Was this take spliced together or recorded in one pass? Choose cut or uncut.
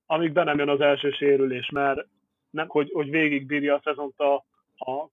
cut